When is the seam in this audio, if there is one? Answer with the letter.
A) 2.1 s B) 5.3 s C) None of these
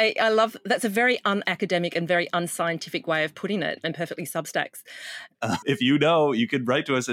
B